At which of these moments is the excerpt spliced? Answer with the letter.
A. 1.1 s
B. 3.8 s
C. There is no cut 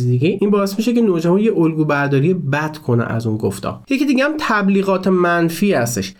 B